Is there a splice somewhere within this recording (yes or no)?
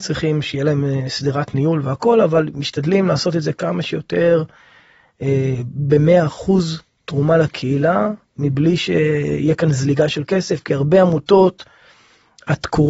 no